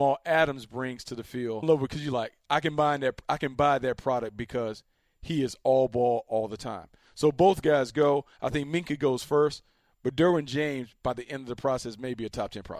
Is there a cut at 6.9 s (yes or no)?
no